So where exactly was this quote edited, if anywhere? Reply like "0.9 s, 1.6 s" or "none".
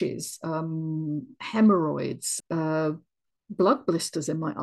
2.4 s